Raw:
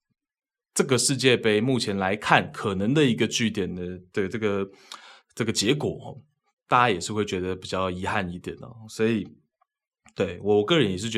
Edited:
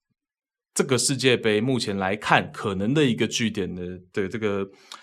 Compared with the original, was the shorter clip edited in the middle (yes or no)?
no